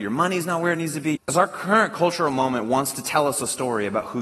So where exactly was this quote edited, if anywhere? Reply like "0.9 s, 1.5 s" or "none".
1.2 s